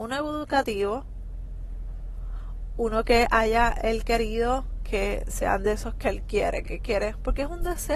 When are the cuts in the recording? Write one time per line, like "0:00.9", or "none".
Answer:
0:06.6